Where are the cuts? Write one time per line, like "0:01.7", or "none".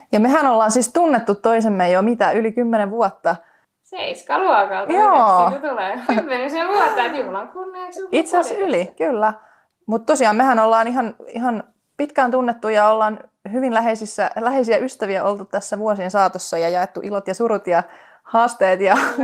0:06.1